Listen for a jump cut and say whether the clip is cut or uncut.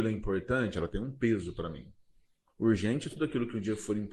uncut